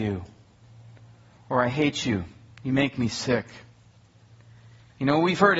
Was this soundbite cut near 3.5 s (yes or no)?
no